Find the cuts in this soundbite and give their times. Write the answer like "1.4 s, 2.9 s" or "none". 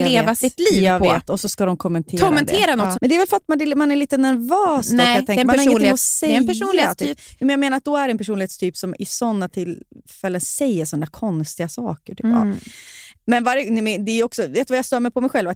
2.9 s